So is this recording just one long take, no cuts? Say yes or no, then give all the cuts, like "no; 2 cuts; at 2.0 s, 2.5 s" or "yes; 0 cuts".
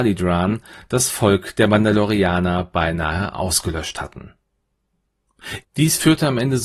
no; 1 cut; at 5.6 s